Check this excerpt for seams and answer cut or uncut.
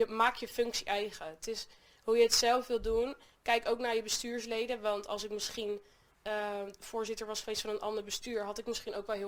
uncut